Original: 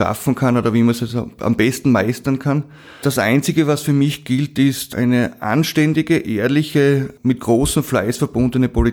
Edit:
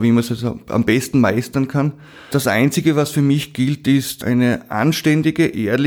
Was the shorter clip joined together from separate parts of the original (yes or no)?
no